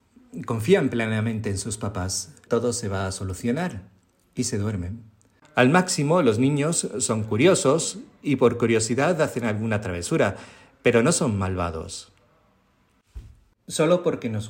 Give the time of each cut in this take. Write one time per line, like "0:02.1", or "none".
0:02.5
0:05.4
0:13.5